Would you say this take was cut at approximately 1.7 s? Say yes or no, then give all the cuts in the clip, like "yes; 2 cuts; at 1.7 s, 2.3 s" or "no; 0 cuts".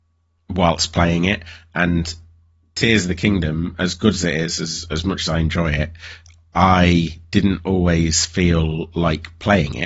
no; 0 cuts